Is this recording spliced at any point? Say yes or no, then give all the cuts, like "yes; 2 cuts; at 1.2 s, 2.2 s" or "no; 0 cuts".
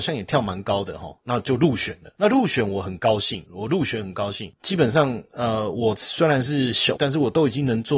yes; 2 cuts; at 4.6 s, 7.0 s